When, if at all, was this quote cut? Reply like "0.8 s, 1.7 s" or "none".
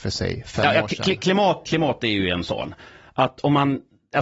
1.7 s